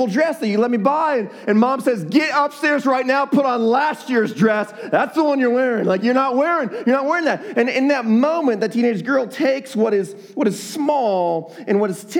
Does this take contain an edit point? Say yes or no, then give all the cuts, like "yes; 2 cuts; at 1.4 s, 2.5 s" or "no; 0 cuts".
no; 0 cuts